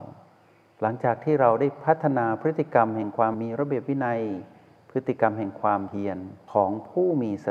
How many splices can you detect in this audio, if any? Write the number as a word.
one